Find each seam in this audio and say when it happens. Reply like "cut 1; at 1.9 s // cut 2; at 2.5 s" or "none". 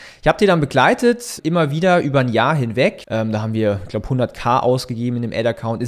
cut 1; at 1.4 s // cut 2; at 3.0 s